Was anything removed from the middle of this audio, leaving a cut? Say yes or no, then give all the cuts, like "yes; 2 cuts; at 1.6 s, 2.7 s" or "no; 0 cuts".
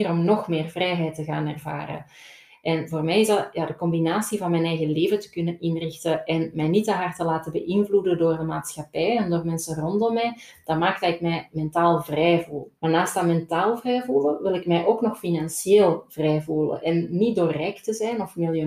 yes; 1 cut; at 12.8 s